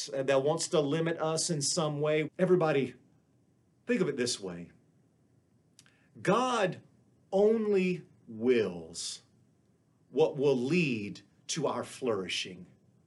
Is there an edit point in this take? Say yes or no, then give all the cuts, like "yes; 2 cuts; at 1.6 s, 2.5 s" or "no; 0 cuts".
yes; 1 cut; at 2.3 s